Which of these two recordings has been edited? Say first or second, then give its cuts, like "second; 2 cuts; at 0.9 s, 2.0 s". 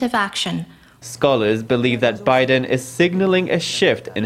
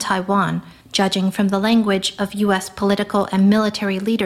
first; 1 cut; at 1.0 s